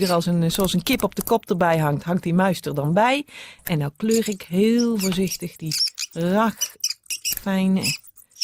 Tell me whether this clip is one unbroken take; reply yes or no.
yes